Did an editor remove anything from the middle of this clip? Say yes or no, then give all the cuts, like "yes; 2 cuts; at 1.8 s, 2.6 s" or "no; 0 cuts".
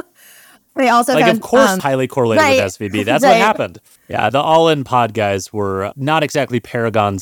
yes; 2 cuts; at 1.8 s, 4.0 s